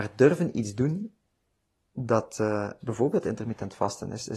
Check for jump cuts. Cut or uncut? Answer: cut